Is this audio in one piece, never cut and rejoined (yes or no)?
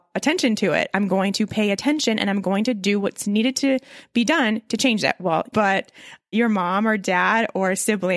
no